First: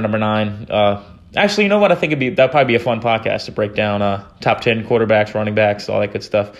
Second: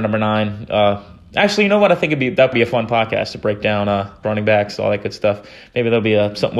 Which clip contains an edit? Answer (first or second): second